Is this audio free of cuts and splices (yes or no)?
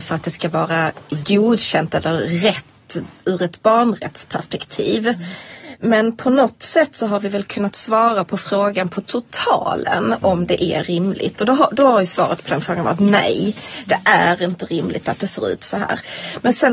yes